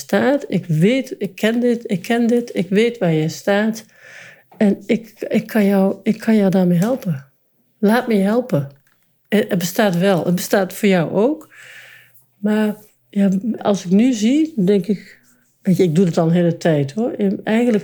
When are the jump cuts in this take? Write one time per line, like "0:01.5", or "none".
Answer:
0:13.6